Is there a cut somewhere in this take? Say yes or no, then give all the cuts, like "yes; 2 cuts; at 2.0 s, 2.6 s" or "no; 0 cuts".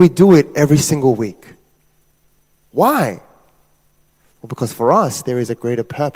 no; 0 cuts